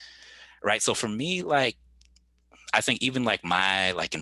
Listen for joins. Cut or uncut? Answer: uncut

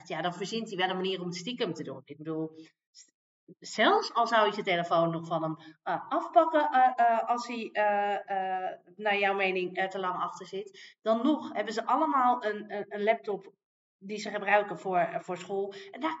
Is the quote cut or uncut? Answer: uncut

